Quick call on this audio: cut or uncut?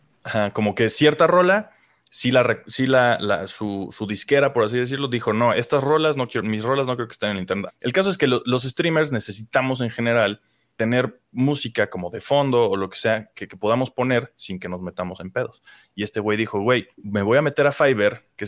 cut